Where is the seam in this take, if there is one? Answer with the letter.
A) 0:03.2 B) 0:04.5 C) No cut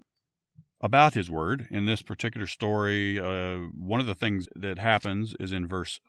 B